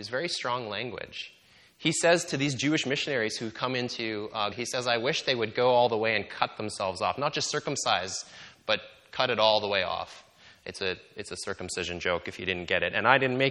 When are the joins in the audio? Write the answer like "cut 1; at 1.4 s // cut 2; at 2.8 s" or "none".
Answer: cut 1; at 4.5 s

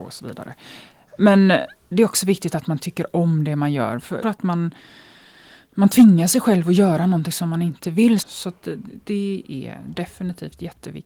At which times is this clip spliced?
cut 1; at 4.2 s // cut 2; at 8.2 s

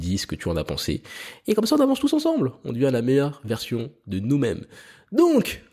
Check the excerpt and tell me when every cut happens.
none

